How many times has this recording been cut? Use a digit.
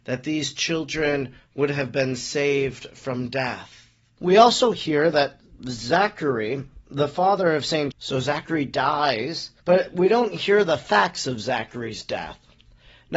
2